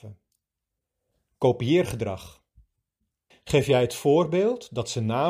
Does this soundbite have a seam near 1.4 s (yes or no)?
no